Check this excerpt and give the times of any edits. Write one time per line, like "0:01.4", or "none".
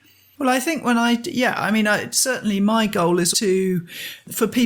0:03.3